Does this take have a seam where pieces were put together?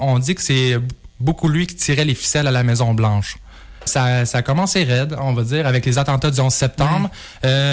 yes; 1 cut; at 3.9 s

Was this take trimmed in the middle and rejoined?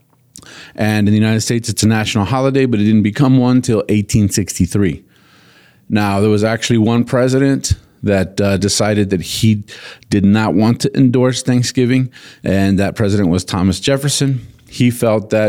no; 0 cuts

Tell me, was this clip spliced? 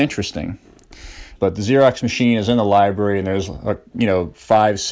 yes; 1 cut; at 1.4 s

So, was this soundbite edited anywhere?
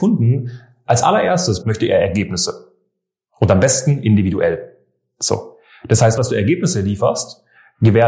yes; 2 cuts; at 1.6 s, 6.2 s

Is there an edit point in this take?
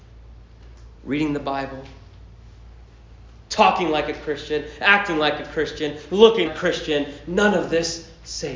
yes; 2 cuts; at 3.5 s, 6.4 s

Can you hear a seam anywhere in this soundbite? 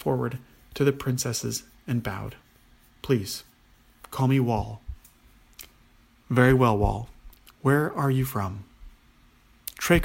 no; 0 cuts

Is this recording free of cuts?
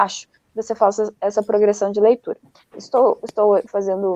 no; 1 cut; at 2.7 s

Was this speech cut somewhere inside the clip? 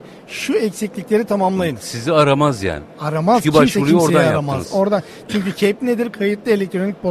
no; 0 cuts

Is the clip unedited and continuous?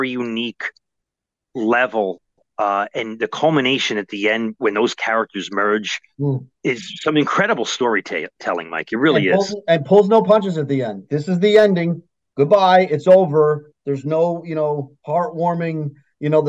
yes; 0 cuts

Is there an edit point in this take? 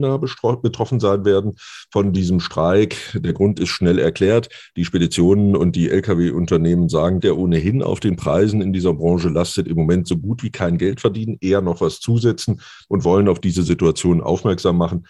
yes; 1 cut; at 7.2 s

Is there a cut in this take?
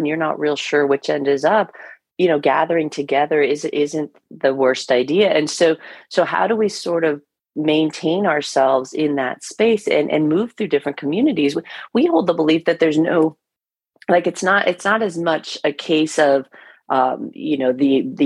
no; 0 cuts

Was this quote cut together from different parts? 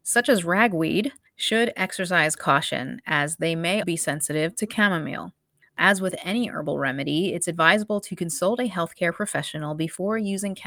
yes; 1 cut; at 3.8 s

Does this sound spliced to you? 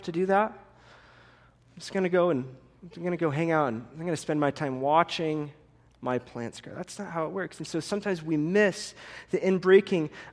no; 0 cuts

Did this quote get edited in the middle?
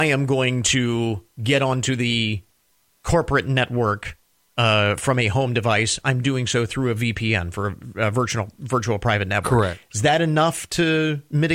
no; 0 cuts

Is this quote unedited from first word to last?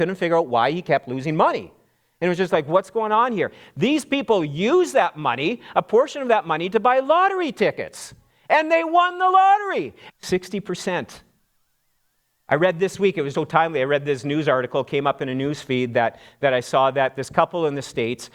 no; 2 cuts; at 10.1 s, 13.3 s

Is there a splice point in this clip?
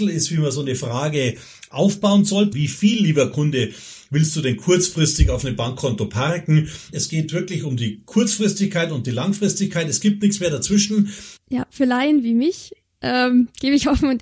yes; 3 cuts; at 2.5 s, 6.9 s, 11.4 s

